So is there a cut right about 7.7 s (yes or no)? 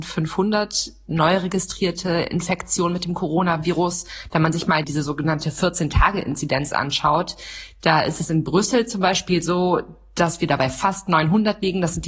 no